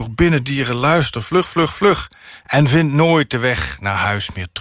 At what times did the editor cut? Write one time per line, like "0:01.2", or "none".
0:02.4